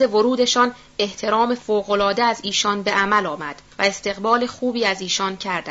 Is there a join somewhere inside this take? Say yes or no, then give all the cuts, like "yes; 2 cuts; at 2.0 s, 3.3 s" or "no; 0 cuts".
yes; 1 cut; at 3.7 s